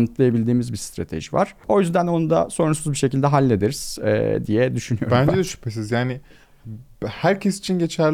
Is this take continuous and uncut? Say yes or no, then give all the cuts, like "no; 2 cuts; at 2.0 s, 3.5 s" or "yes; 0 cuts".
yes; 0 cuts